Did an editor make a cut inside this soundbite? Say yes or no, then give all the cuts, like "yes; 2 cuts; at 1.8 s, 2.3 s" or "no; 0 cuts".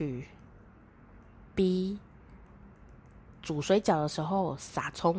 no; 0 cuts